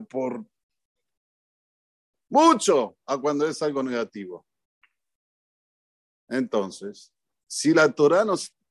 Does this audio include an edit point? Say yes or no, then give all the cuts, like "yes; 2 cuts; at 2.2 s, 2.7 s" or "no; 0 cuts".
no; 0 cuts